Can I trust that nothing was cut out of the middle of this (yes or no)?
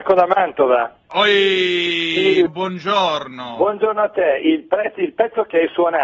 no